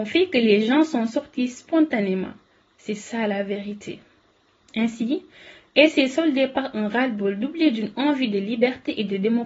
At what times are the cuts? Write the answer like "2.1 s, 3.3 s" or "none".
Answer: 4.6 s